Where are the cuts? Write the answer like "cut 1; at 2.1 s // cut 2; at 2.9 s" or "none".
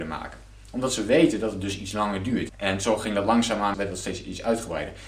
cut 1; at 2.5 s // cut 2; at 3.7 s